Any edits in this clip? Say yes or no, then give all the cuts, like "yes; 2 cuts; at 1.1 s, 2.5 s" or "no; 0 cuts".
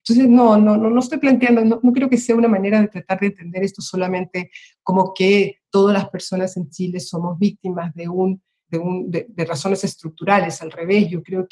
no; 0 cuts